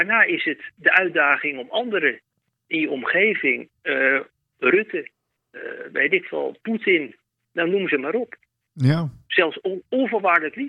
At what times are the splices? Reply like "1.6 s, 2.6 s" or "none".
none